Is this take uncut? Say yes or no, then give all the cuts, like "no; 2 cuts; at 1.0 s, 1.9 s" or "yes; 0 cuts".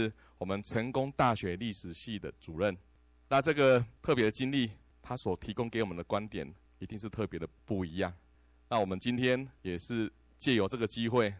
yes; 0 cuts